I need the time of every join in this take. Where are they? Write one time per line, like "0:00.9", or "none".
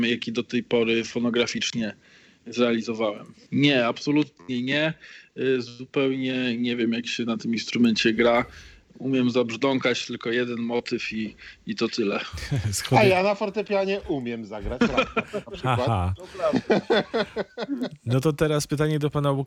0:03.5